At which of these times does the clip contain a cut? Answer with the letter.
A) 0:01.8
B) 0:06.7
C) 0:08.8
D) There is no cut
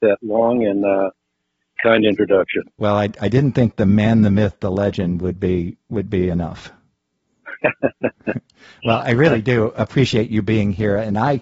A